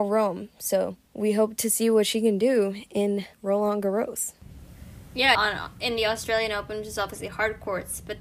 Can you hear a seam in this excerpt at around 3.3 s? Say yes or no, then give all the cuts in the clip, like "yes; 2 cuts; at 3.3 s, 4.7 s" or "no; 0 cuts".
yes; 3 cuts; at 1.1 s, 3.3 s, 5.3 s